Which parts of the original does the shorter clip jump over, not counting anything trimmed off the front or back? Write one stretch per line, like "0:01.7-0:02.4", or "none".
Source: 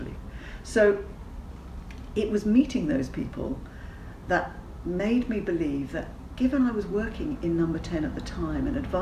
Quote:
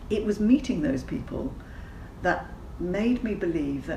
none